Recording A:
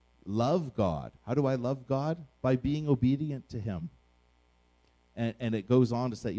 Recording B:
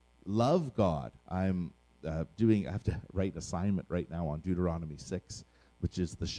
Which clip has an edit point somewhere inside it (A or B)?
B